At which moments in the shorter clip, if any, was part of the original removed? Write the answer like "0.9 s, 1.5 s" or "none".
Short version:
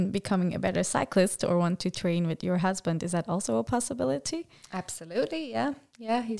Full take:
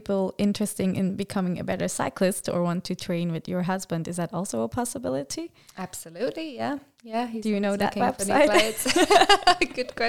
none